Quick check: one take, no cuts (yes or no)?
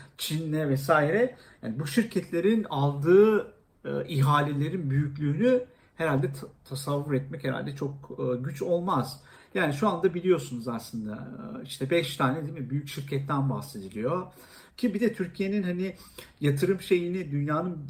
no